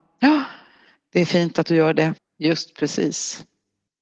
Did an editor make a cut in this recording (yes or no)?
yes